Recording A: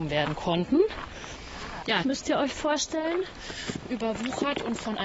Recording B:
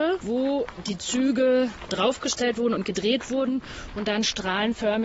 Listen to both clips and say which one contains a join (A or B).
A